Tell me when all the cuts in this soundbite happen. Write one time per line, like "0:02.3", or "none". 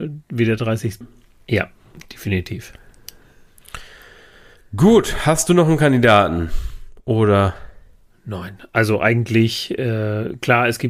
0:01.0